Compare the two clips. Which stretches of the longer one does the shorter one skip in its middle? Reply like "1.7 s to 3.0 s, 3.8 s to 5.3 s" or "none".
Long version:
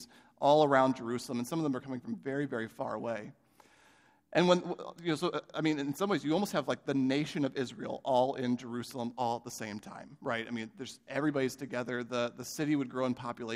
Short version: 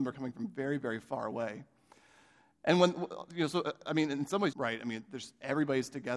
6.2 s to 10.2 s